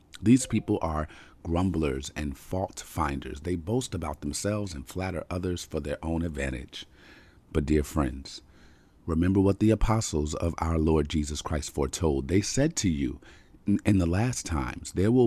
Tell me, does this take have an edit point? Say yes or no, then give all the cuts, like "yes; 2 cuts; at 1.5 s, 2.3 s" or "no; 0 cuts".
yes; 1 cut; at 3.4 s